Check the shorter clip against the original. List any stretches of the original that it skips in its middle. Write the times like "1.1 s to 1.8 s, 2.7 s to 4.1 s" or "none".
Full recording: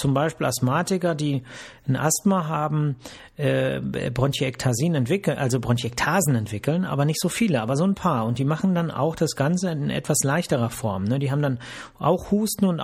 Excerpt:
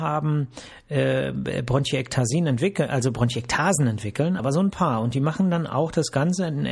6.9 s to 7.6 s